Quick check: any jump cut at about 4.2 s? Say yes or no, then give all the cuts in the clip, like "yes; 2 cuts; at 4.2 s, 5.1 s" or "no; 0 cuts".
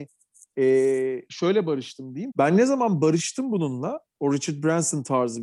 no; 1 cut; at 2.3 s